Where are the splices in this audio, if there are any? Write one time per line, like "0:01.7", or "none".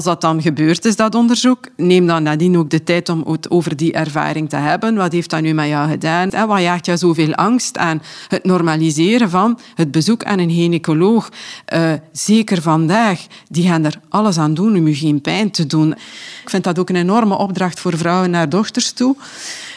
0:06.3